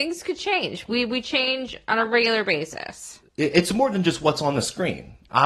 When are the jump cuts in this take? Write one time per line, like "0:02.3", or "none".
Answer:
0:03.3